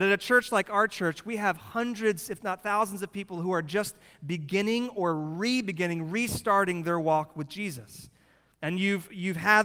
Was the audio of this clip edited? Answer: yes; 1 cut; at 8.5 s

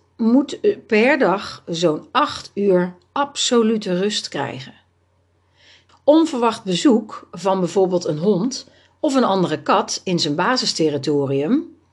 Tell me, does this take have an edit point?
yes; 1 cut; at 5.9 s

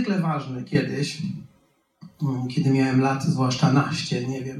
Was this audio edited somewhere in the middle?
no; 0 cuts

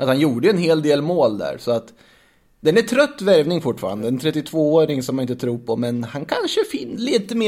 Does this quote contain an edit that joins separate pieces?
no; 0 cuts

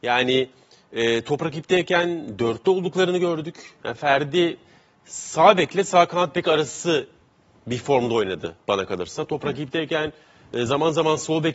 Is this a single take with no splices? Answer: yes; 0 cuts

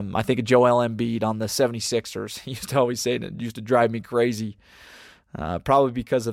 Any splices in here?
no; 0 cuts

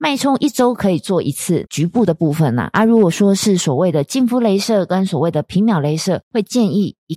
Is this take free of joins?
yes; 0 cuts

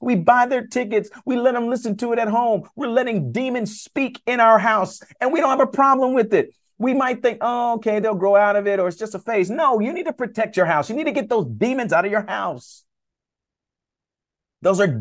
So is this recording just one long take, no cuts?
yes; 0 cuts

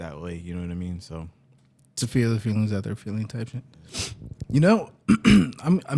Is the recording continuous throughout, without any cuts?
yes; 0 cuts

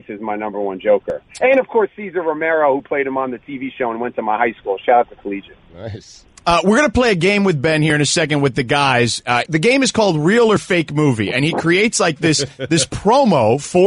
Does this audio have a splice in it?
yes; 1 cut; at 9.5 s

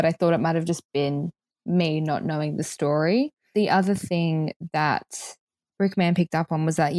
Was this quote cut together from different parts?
no; 0 cuts

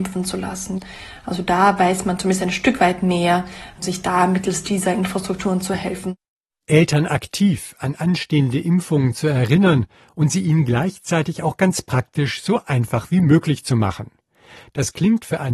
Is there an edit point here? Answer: no; 0 cuts

